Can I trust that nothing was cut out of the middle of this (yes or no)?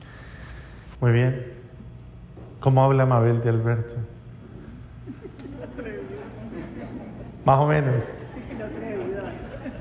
no